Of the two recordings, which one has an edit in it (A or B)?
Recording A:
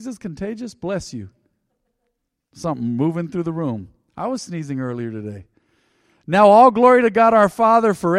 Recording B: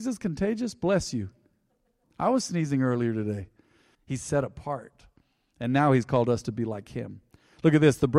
B